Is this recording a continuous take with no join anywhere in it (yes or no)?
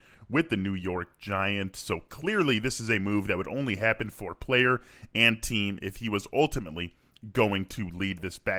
yes